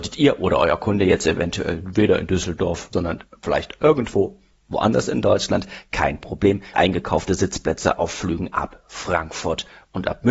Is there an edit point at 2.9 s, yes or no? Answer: yes